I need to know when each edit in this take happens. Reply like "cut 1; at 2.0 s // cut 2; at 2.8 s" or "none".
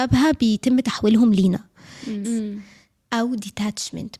cut 1; at 2.2 s